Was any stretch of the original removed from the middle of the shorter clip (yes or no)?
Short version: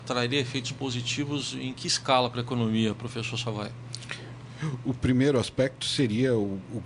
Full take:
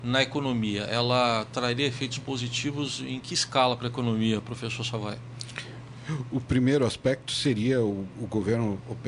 no